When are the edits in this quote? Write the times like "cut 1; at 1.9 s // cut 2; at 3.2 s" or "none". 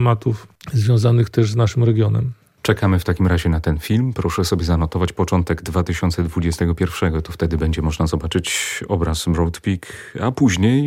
none